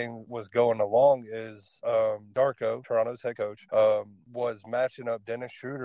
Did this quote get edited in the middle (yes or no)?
no